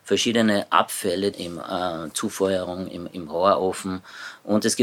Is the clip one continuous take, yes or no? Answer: no